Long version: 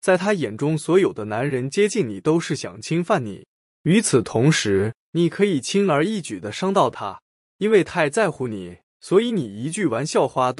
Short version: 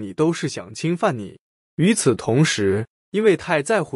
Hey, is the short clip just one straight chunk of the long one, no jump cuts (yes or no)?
no